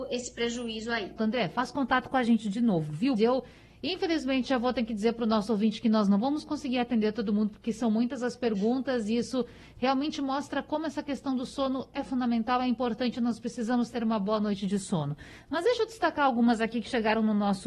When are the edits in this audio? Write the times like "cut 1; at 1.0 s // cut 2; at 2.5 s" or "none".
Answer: cut 1; at 1.2 s // cut 2; at 3.2 s